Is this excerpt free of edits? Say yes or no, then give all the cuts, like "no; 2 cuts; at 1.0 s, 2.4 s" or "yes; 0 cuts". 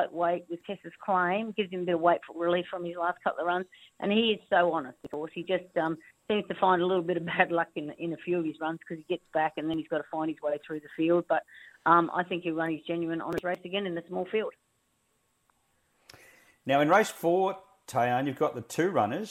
yes; 0 cuts